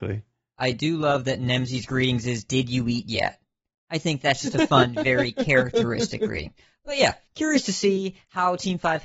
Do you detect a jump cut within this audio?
yes; 1 cut; at 7.3 s

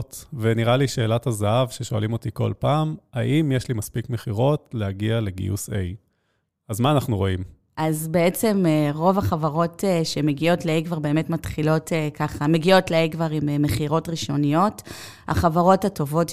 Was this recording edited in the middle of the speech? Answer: no; 0 cuts

